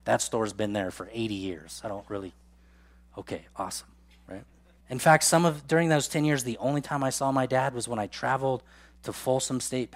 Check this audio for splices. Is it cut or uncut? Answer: cut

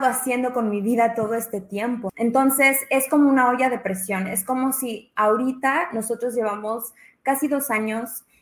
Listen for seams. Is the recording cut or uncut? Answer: cut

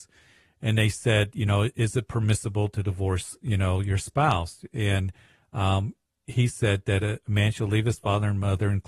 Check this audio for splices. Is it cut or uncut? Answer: uncut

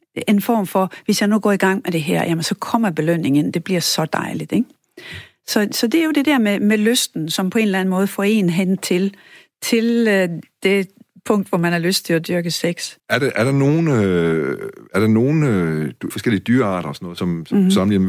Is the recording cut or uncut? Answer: cut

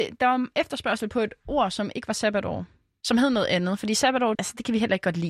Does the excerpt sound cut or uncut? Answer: cut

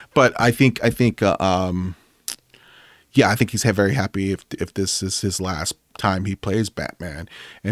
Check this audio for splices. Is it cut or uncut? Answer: uncut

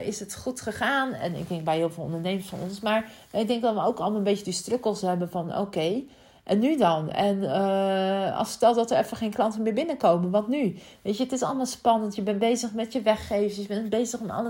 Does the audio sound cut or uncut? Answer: uncut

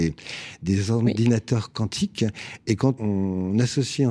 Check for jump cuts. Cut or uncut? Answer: cut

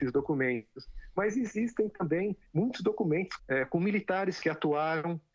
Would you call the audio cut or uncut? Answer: cut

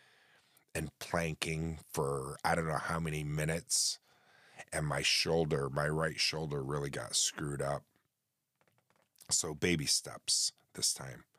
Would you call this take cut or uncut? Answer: uncut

